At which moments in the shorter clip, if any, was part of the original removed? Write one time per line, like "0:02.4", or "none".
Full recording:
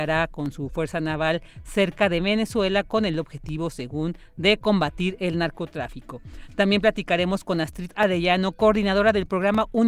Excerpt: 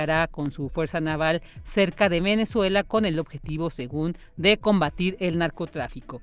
none